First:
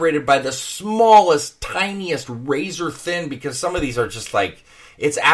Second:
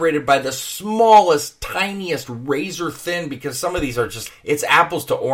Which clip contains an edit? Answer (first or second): second